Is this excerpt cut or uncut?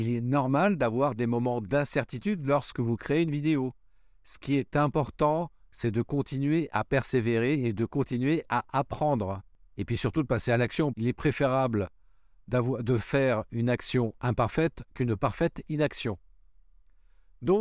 cut